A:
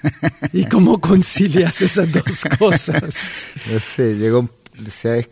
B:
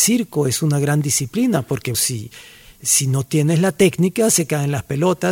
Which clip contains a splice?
B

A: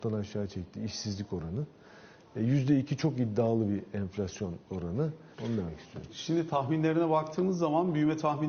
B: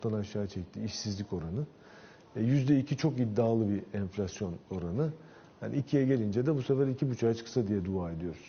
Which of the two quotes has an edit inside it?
A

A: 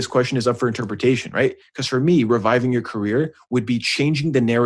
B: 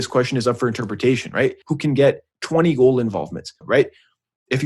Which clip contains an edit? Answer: B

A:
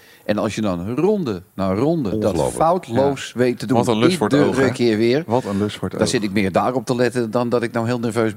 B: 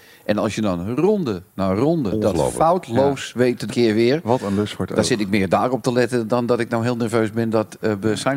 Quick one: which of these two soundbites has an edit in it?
B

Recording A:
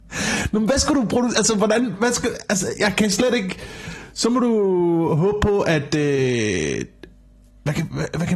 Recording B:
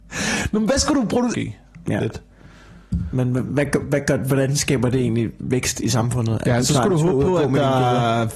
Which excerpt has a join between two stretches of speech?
B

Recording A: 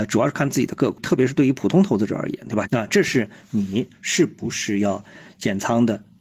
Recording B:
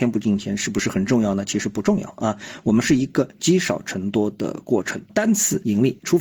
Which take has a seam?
A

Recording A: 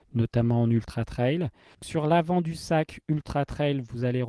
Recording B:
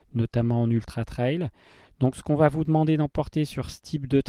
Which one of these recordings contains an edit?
A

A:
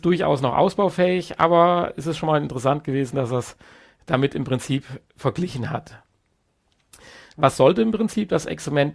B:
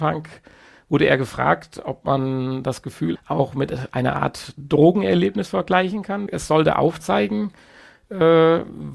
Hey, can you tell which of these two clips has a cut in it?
B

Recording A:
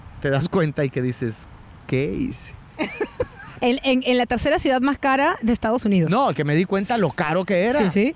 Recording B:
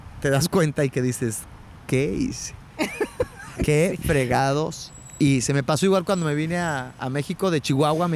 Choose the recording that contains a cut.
A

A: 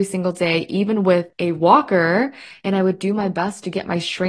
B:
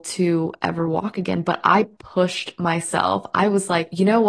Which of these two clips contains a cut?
A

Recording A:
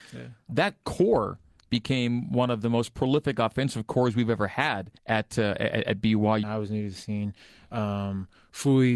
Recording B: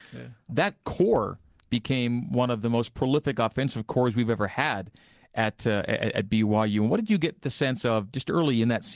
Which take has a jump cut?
A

